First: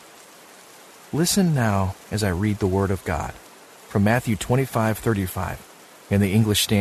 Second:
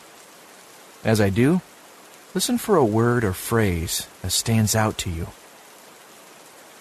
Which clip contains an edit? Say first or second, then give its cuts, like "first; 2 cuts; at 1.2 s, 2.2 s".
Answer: first; 1 cut; at 1.0 s